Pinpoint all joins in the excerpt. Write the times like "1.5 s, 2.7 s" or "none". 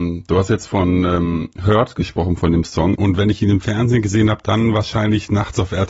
2.9 s

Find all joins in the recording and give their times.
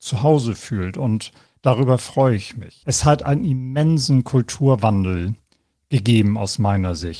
2.8 s

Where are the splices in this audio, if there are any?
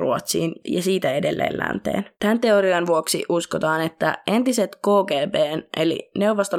2.1 s

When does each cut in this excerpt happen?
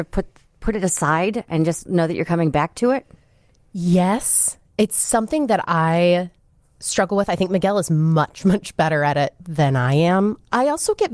none

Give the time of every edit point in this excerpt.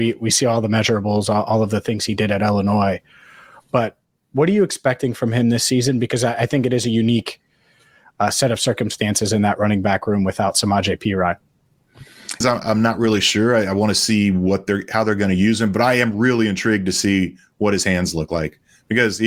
12.4 s

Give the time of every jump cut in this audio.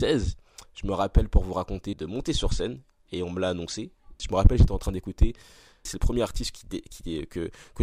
1.9 s, 4.2 s, 5.9 s

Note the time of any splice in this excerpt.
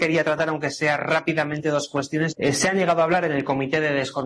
2.3 s

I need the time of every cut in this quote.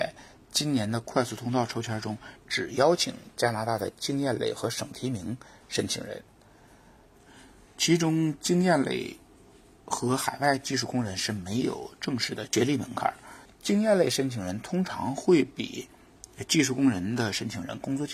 13.5 s

